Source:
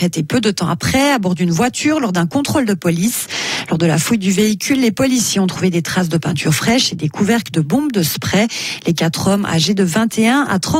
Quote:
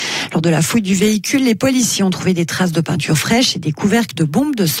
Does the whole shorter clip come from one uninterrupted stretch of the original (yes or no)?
yes